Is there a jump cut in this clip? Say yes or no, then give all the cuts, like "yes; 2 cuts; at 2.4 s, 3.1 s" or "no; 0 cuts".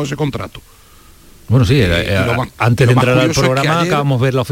no; 0 cuts